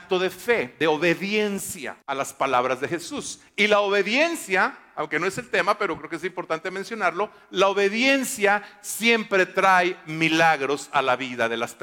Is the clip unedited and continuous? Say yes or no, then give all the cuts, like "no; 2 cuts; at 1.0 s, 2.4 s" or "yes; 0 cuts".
no; 1 cut; at 2.0 s